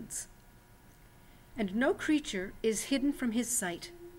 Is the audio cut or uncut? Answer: cut